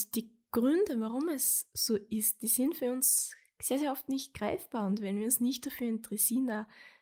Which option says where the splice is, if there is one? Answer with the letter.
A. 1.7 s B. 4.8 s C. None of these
C